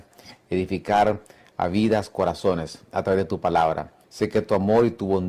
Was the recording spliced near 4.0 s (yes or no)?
yes